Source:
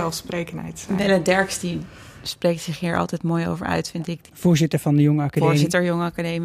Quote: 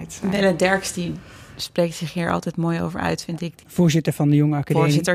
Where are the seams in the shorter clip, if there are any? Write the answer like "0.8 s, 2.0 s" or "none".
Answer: none